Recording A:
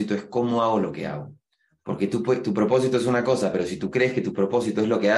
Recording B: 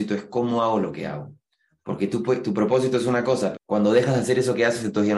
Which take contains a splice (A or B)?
B